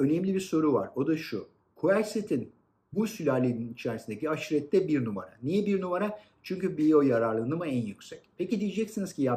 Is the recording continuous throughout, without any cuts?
yes; 0 cuts

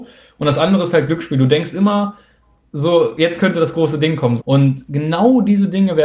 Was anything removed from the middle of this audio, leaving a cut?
yes; 1 cut; at 4.4 s

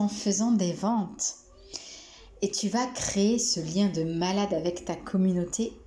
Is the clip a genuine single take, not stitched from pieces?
yes; 0 cuts

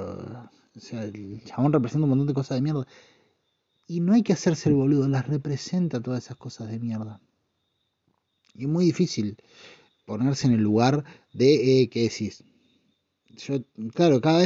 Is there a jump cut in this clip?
no; 0 cuts

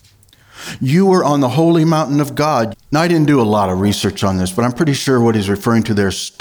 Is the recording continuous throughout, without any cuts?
no; 1 cut; at 2.7 s

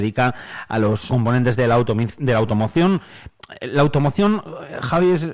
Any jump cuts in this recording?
yes; 1 cut; at 1.1 s

